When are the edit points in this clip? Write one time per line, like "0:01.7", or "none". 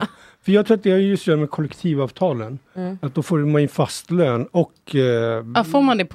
none